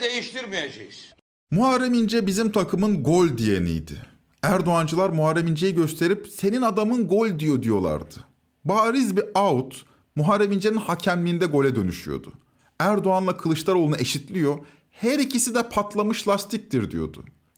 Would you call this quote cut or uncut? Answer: uncut